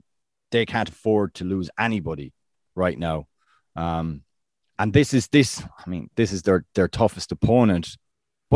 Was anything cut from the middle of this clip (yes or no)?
no